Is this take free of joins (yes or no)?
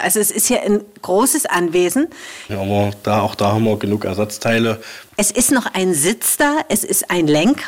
no